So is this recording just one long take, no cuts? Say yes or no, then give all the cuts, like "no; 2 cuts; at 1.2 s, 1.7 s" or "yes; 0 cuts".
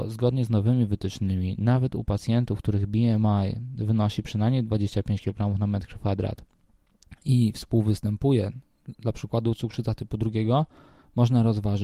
yes; 0 cuts